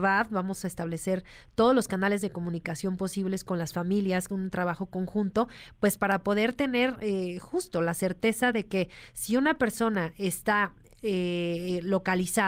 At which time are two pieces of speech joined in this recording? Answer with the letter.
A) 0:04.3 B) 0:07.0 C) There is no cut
A